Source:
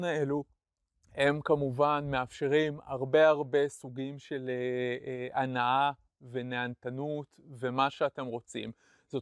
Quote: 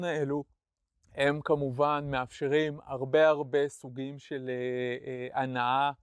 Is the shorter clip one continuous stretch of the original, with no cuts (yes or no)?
yes